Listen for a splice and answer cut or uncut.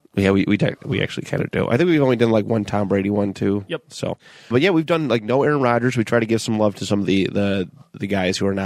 cut